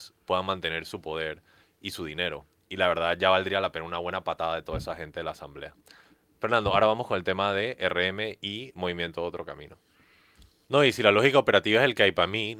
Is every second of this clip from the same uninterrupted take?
no; 1 cut; at 10.7 s

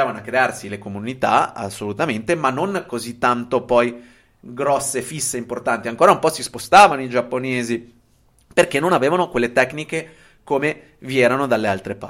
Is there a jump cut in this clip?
no; 0 cuts

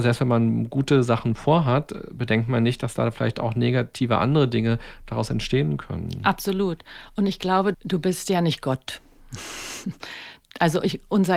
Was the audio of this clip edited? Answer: yes; 1 cut; at 7.7 s

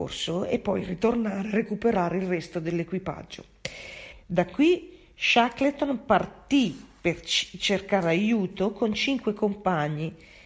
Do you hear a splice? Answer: yes; 1 cut; at 4.1 s

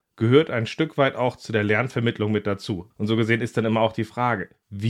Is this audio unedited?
no; 1 cut; at 2.9 s

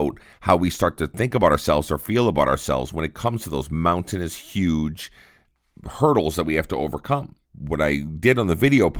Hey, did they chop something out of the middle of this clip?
no; 0 cuts

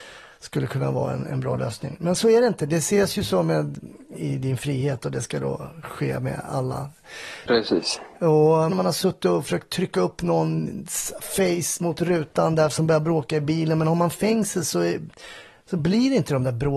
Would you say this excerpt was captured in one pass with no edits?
no; 3 cuts; at 4.1 s, 7.5 s, 8.7 s

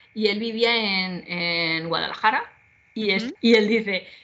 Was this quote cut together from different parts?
yes; 1 cut; at 3.4 s

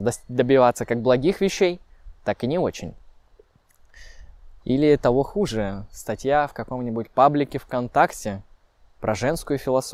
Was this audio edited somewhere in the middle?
yes; 1 cut; at 4.6 s

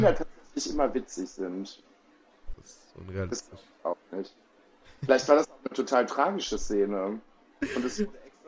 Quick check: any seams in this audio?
yes; 1 cut; at 2.5 s

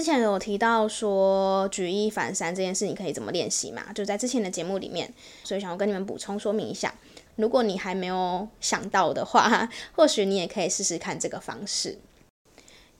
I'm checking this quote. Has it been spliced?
yes; 2 cuts; at 5.4 s, 7.3 s

